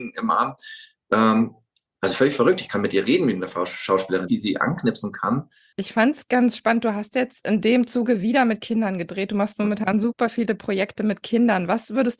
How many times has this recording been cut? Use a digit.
3